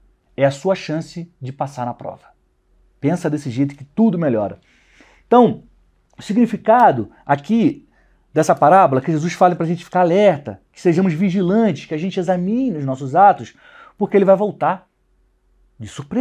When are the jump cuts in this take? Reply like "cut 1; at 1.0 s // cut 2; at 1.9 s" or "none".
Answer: none